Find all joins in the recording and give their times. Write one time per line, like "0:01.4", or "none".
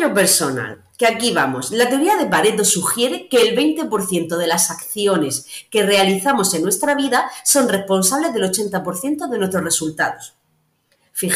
none